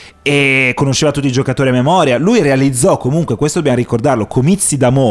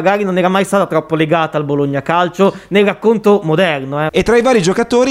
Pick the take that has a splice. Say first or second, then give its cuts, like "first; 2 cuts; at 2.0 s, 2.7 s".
second; 1 cut; at 4.1 s